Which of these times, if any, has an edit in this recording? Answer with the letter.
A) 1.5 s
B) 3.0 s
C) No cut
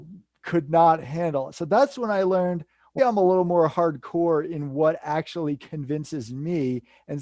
B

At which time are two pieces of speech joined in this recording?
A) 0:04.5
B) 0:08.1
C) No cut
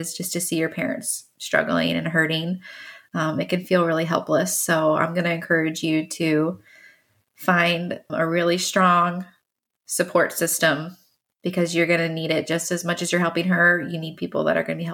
B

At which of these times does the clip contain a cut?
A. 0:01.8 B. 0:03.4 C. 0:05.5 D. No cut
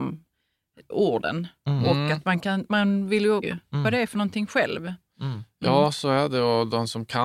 B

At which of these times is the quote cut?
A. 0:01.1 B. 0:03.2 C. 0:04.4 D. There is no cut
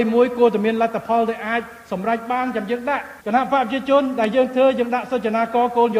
B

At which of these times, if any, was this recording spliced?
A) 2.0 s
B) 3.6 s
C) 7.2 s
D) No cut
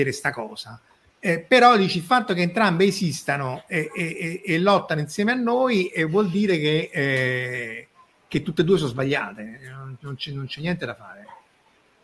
D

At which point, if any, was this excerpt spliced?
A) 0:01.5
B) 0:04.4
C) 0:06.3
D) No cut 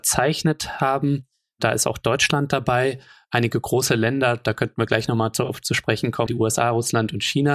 C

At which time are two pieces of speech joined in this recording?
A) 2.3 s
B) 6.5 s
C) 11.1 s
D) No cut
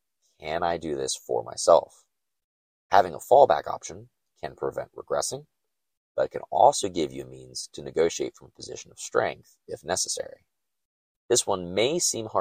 C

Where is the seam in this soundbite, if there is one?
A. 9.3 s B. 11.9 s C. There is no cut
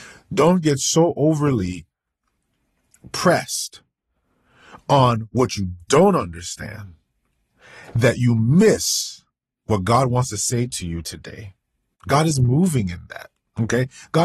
B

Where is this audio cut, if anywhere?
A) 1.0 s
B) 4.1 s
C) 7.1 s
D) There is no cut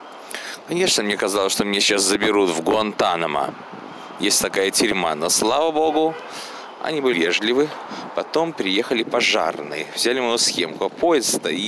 C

